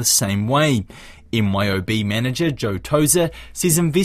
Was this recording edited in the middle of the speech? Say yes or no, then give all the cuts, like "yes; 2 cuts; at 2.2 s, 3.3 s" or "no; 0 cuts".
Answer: no; 0 cuts